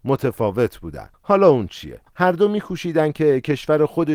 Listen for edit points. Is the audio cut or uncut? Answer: cut